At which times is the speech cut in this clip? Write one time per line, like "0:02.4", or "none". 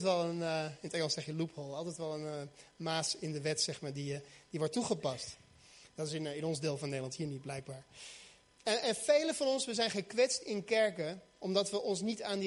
none

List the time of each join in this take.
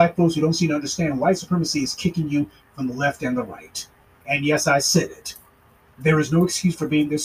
0:04.2

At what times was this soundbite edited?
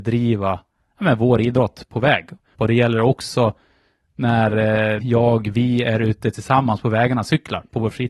0:02.5
0:05.0

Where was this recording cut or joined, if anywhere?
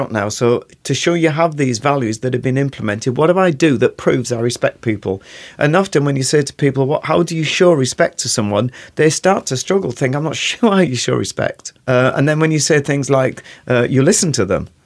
0:11.8

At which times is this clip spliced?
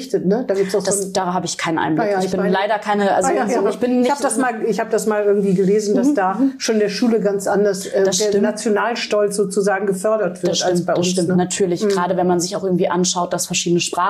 none

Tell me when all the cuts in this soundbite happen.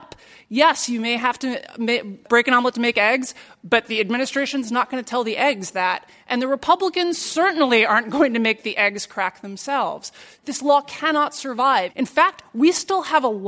0:10.4
0:11.9

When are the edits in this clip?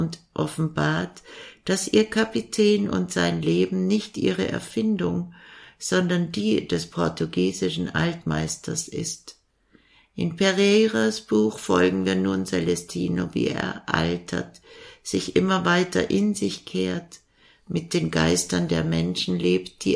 none

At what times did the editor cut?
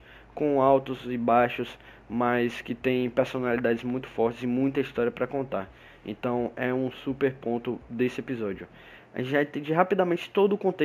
0:09.0

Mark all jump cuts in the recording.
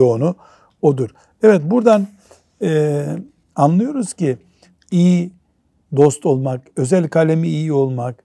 0:04.7

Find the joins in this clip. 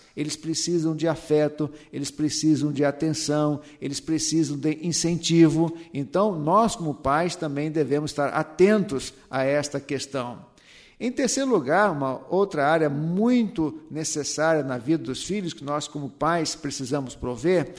none

